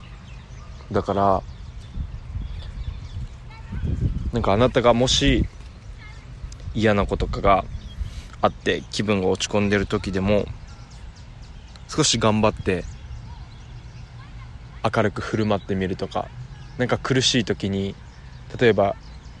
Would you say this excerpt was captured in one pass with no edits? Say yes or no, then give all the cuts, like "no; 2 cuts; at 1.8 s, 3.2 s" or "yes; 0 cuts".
no; 1 cut; at 7.2 s